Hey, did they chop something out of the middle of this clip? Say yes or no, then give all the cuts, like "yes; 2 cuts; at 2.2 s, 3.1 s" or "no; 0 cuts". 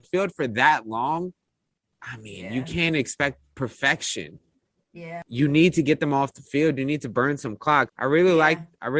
yes; 1 cut; at 7.9 s